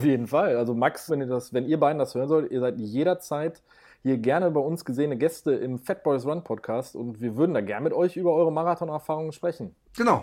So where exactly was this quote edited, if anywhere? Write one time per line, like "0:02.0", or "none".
0:01.1